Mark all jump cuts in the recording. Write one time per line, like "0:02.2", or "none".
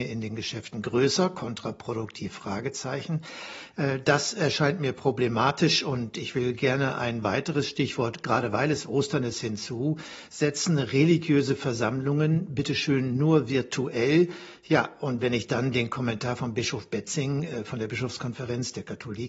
none